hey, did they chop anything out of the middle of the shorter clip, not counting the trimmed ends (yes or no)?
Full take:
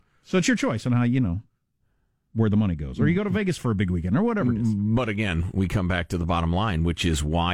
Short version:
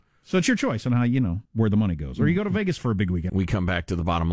yes